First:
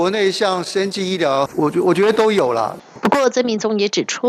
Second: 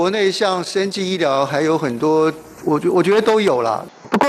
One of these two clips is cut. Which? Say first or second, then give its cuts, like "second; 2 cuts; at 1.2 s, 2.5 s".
first; 1 cut; at 1.5 s